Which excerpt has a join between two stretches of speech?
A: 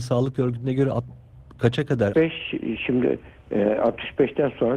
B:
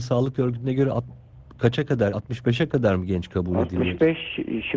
A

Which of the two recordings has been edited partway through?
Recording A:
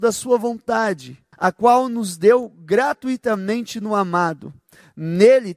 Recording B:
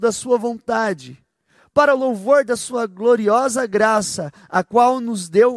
A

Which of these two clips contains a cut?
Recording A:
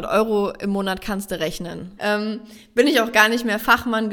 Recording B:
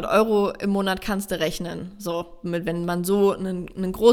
A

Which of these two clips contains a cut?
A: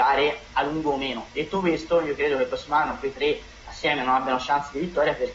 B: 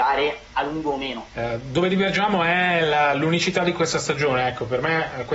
B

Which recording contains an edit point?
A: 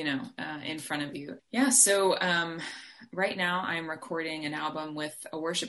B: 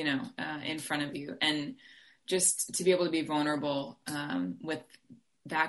A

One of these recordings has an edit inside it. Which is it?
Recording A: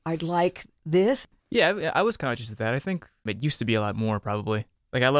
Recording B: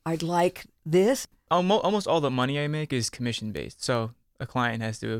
A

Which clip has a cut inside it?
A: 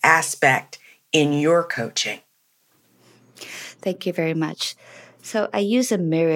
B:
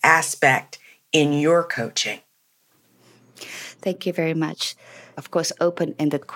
B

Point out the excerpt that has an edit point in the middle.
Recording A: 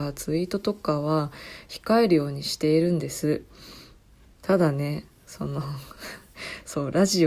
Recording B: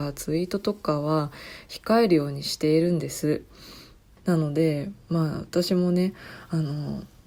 B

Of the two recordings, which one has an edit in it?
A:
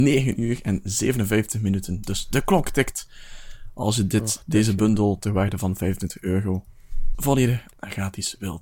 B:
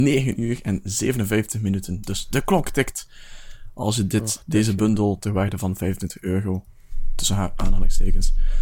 A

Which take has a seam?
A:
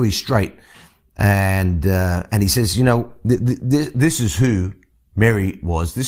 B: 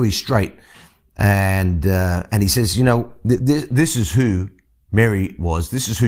B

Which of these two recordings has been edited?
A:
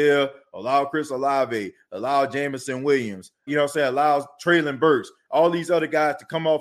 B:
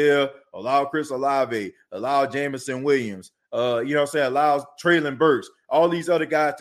A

